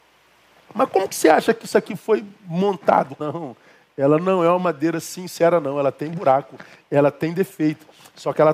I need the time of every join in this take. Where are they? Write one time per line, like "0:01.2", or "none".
0:03.2